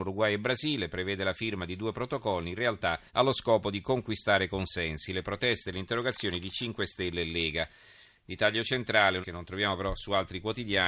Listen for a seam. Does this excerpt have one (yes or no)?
yes